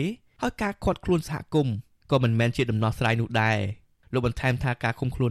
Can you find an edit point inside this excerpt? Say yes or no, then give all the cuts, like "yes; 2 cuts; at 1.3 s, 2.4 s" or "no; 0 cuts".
no; 0 cuts